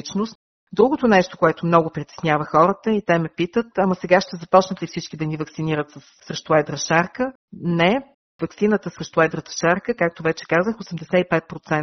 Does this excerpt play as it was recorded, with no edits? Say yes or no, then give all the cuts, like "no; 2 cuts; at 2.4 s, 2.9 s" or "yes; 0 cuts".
yes; 0 cuts